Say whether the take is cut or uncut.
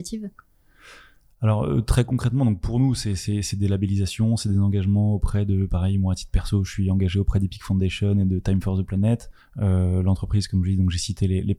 uncut